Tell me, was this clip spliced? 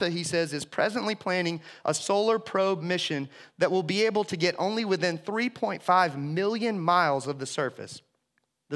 no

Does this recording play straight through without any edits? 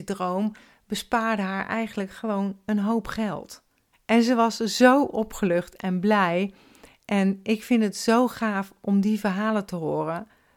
no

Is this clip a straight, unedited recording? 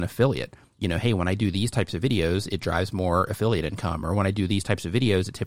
yes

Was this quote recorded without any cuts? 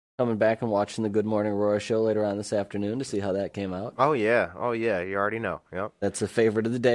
yes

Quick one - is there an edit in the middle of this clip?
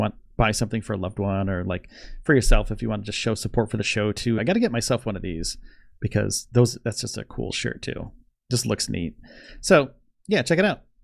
yes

